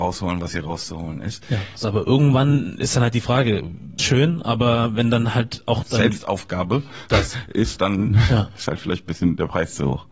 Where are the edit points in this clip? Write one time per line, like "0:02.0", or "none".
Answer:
0:01.8
0:04.0